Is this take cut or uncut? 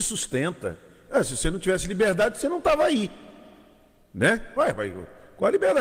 cut